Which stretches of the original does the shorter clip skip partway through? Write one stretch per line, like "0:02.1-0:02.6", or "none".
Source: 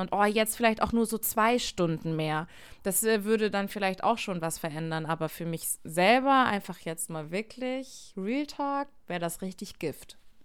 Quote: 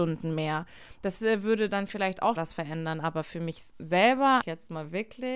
0:04.2-0:04.4
0:06.5-0:06.8